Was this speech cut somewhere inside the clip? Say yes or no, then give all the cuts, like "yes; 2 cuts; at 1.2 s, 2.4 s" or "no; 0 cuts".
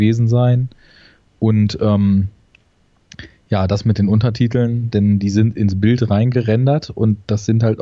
yes; 1 cut; at 4.9 s